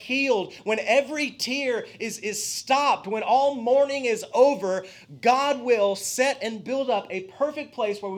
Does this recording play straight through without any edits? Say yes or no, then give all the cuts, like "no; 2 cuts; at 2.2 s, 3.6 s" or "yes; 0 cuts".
yes; 0 cuts